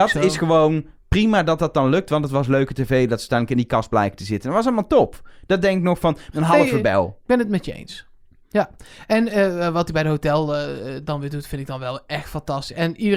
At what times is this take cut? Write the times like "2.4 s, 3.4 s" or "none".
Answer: 6.3 s